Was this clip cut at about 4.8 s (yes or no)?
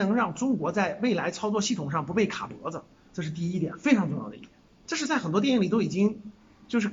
yes